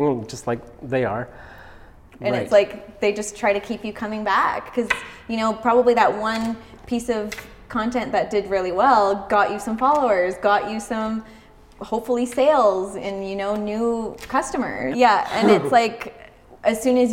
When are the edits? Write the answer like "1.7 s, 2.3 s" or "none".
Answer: 2.1 s, 14.9 s